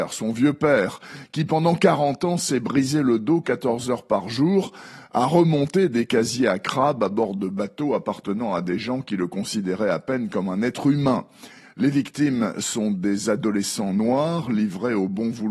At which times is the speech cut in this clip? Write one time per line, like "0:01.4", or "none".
0:11.6